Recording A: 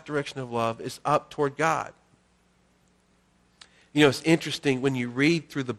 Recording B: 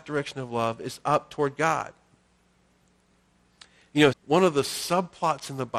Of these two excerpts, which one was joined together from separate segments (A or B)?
B